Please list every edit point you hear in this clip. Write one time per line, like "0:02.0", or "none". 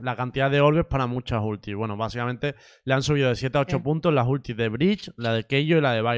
none

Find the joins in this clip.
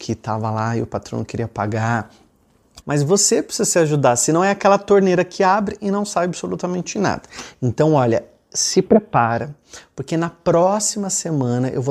0:02.8
0:07.5

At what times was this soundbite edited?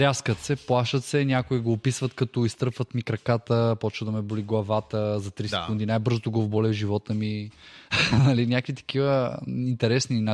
none

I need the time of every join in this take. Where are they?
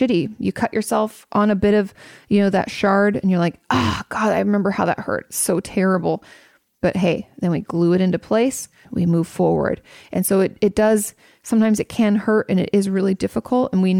0:08.8

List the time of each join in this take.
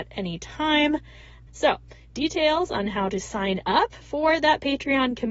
0:01.5

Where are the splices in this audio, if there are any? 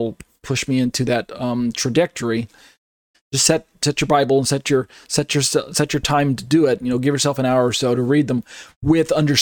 0:03.1

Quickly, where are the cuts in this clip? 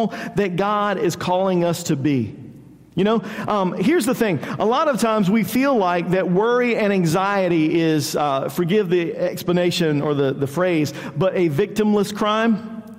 none

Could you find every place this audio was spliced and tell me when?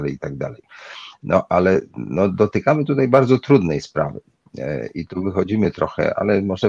none

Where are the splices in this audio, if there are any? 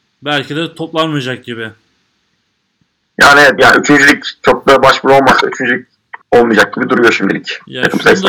0:03.6
0:06.2

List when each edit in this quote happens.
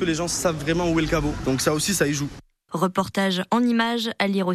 0:02.7

